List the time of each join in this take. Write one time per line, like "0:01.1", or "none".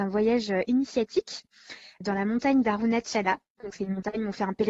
none